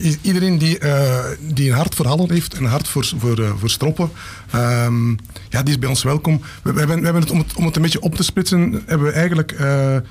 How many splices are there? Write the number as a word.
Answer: zero